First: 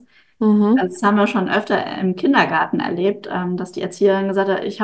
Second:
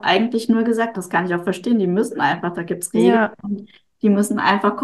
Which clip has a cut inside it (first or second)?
second